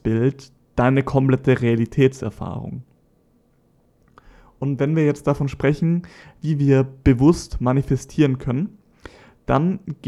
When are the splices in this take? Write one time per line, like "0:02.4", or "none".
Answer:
none